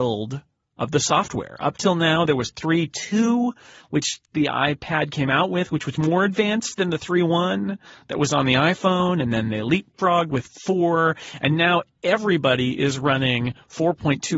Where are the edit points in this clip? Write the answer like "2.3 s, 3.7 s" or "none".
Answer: none